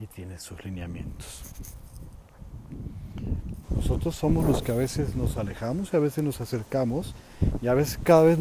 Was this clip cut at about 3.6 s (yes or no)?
yes